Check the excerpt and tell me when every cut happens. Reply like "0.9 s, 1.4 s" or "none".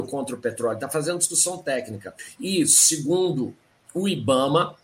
none